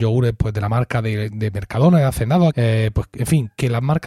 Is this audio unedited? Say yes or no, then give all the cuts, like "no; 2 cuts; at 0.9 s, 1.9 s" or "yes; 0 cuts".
no; 1 cut; at 2.5 s